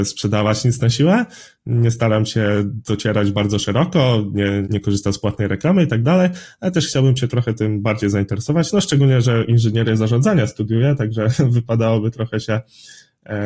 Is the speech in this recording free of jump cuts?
no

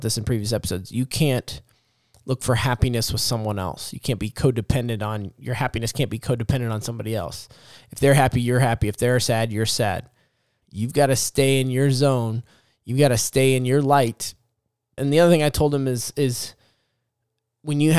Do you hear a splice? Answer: yes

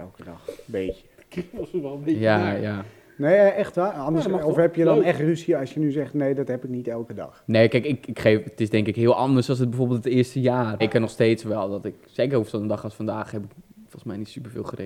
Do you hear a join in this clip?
yes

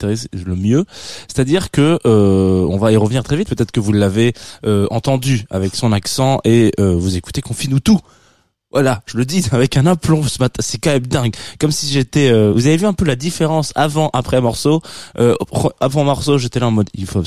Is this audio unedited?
no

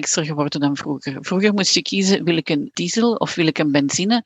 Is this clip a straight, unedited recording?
yes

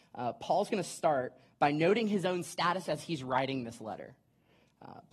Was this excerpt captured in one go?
yes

